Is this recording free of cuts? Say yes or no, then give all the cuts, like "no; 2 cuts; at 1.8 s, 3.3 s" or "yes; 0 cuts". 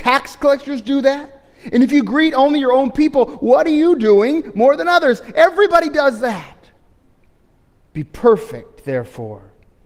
yes; 0 cuts